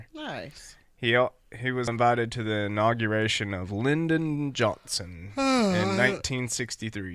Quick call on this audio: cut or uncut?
cut